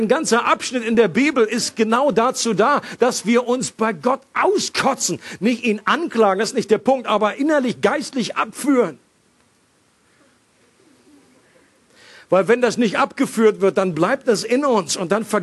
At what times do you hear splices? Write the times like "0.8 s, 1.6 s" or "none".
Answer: none